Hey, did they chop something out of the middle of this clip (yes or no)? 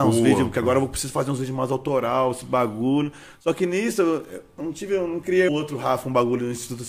yes